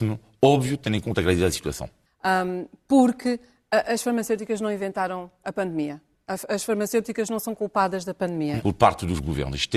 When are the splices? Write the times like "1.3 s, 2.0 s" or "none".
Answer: 2.1 s, 8.6 s